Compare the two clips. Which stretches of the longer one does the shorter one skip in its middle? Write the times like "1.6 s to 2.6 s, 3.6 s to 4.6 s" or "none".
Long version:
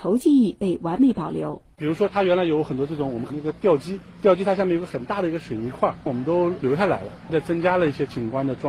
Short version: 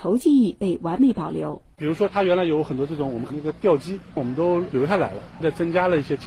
4.1 s to 6.0 s